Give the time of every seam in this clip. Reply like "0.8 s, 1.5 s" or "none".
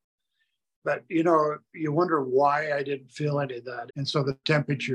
3.9 s